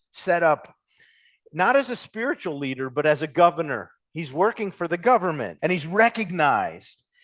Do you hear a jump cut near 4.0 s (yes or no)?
no